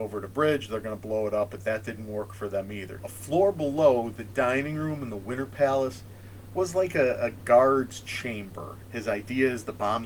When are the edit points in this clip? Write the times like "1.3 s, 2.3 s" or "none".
3.0 s, 8.9 s

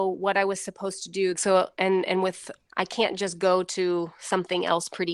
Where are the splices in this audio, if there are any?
1.3 s, 2.7 s

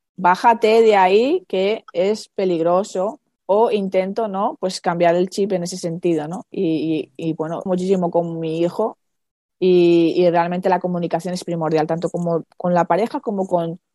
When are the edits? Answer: 7.7 s

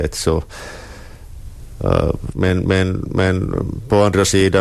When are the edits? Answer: 2.3 s

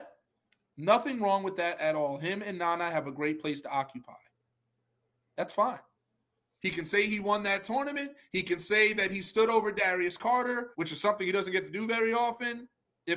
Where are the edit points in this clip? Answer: 6.6 s, 10.7 s

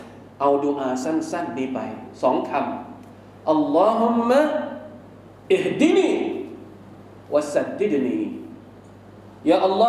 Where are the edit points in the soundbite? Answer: none

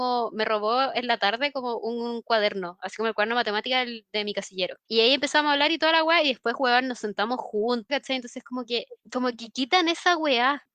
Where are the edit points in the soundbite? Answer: 4.9 s, 7.9 s

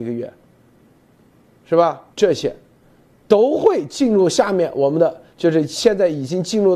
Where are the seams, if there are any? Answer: 2.1 s, 5.3 s

